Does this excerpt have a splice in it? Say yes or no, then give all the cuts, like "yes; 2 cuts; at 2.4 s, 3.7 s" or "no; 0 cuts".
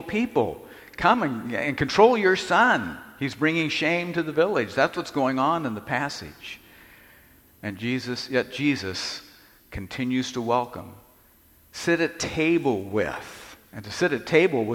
no; 0 cuts